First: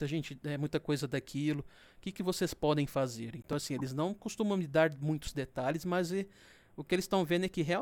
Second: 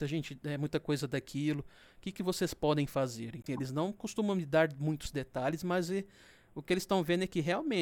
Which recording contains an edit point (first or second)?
second